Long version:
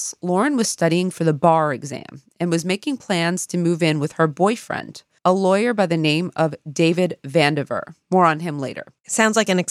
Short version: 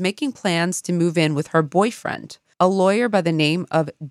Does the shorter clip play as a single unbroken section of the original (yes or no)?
yes